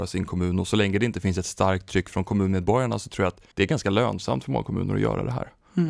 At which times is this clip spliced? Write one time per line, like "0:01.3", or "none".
0:03.5